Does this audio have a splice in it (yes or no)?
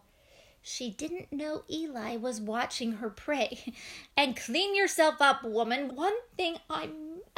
yes